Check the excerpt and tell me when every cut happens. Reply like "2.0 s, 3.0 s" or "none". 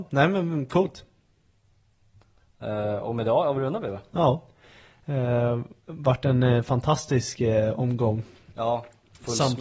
none